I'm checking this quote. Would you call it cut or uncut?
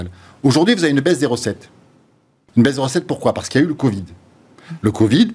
uncut